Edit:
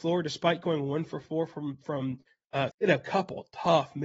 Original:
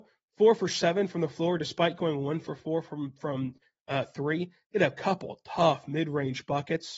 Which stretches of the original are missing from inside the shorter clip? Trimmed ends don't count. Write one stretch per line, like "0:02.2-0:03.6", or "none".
0:04.1-0:04.6

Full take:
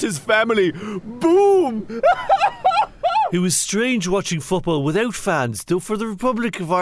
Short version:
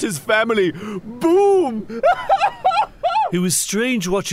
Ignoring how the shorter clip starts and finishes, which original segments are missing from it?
none

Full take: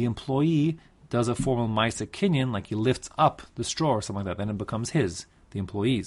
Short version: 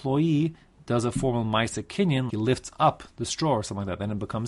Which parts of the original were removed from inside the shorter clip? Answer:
0:02.5-0:02.7

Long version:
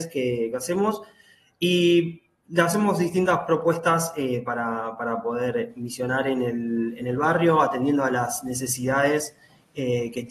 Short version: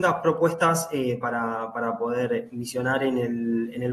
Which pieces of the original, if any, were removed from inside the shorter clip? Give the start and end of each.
none

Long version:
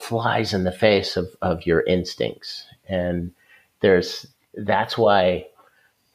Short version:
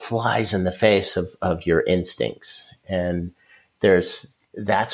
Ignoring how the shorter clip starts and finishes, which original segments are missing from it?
none

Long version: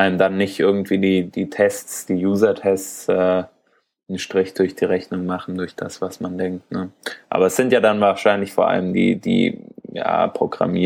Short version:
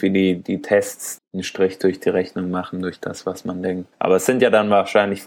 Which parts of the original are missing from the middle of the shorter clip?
0:02.1-0:03.9
0:06.7-0:07.2

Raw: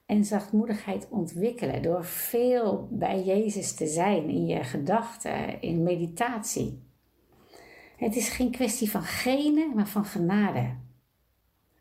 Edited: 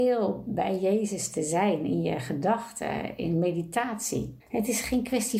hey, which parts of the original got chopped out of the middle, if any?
0:06.8-0:07.9

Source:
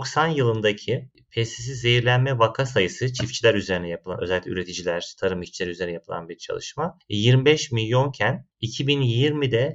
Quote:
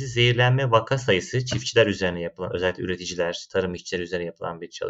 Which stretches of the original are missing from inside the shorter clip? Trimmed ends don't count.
none

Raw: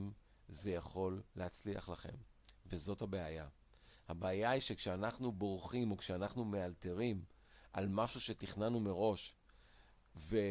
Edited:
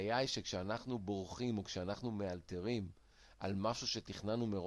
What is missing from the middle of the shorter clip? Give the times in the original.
none

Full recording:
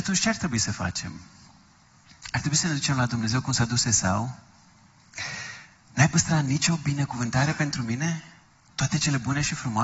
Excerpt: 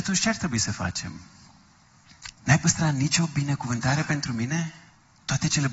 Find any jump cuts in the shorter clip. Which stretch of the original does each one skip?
0:02.3-0:05.8

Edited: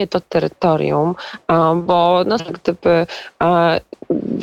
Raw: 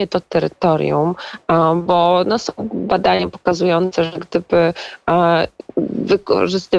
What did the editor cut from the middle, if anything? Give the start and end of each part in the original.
0:02.4-0:04.1

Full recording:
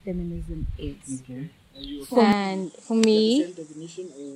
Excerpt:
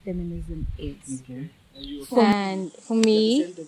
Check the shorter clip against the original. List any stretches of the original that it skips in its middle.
none

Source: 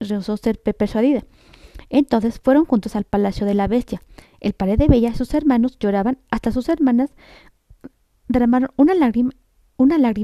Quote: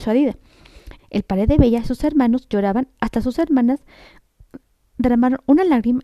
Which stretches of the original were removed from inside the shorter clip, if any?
0:01.9-0:04.3

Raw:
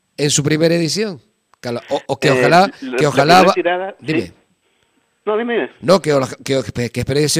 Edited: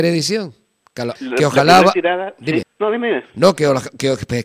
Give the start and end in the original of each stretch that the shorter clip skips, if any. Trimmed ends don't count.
0:01.8-0:02.8
0:04.2-0:05.1

